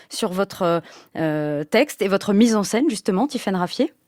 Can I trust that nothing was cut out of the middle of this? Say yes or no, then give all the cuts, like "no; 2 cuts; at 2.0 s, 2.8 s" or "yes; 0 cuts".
yes; 0 cuts